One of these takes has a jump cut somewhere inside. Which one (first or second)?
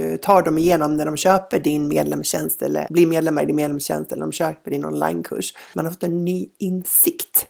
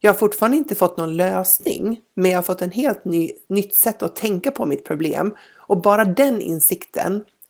first